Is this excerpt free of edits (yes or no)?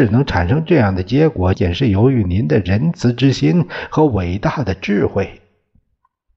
no